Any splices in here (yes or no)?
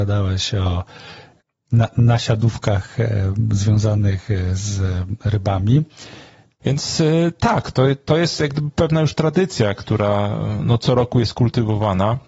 yes